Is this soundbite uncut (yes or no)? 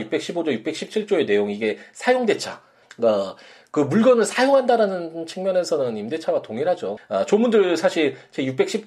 no